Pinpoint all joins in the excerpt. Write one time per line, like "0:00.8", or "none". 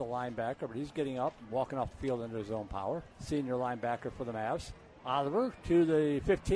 0:03.1
0:05.0